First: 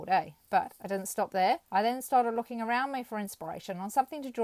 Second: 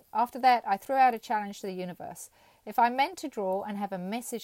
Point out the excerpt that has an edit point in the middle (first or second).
first